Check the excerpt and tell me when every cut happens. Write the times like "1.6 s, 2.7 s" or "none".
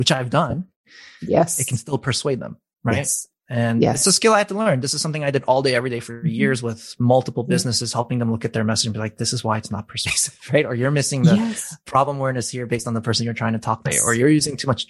13.9 s